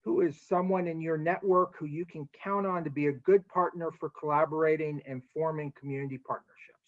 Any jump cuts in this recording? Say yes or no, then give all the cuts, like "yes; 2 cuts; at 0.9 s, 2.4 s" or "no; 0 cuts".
no; 0 cuts